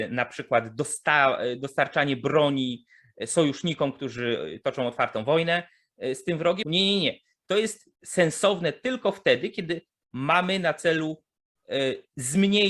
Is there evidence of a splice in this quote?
yes; 2 cuts; at 6.6 s, 7.9 s

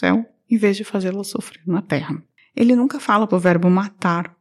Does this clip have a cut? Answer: yes; 1 cut; at 3.3 s

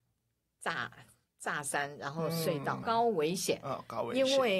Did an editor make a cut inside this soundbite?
yes; 1 cut; at 2.8 s

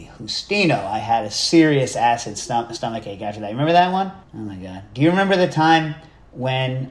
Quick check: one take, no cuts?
no; 1 cut; at 4.2 s

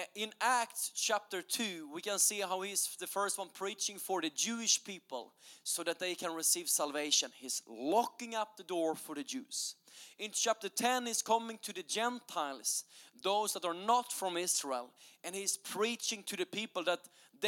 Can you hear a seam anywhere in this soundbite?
no; 0 cuts

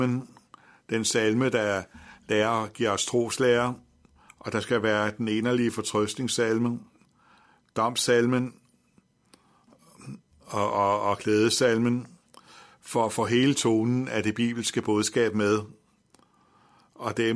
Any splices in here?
no; 0 cuts

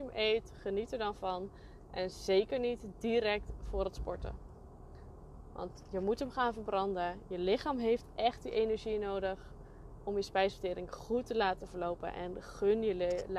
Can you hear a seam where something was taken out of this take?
no; 0 cuts

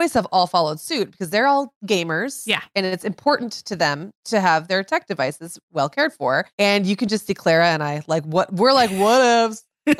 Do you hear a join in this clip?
yes; 1 cut; at 6.5 s

